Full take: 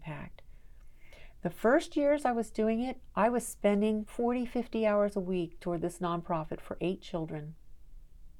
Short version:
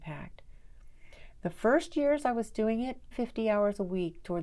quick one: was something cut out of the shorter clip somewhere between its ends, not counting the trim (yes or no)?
yes